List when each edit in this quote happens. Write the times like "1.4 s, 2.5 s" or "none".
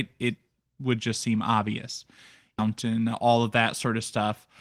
2.6 s